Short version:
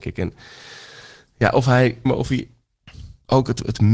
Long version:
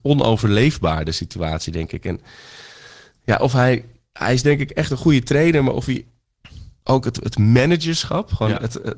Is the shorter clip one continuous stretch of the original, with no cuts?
no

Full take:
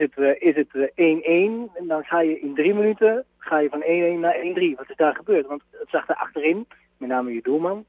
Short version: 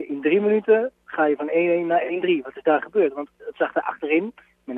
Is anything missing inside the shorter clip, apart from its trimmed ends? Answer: no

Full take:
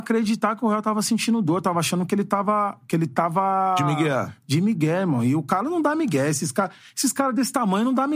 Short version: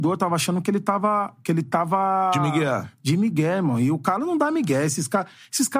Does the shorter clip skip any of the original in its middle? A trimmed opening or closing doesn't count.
no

